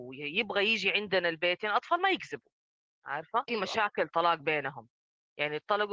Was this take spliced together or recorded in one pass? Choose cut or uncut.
cut